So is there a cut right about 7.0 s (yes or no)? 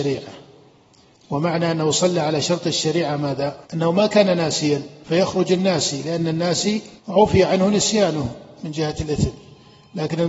yes